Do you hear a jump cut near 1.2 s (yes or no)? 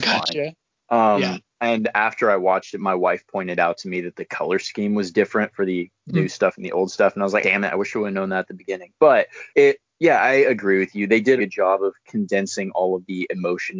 no